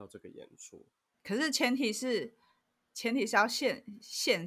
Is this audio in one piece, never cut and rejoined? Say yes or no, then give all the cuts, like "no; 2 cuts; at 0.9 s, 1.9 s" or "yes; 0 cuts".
yes; 0 cuts